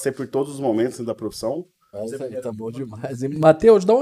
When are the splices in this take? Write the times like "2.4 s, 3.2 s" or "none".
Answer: 1.9 s